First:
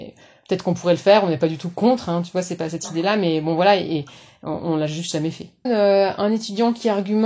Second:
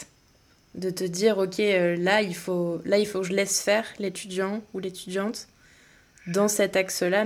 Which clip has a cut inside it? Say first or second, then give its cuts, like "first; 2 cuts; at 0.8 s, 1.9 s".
first; 1 cut; at 5.6 s